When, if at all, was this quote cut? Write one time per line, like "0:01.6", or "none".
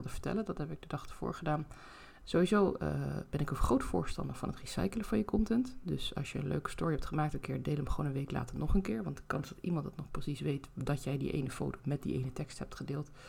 0:02.2